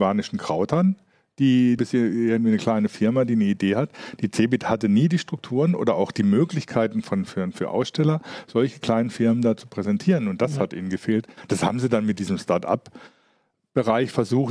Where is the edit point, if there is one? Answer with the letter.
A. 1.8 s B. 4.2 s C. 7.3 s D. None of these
A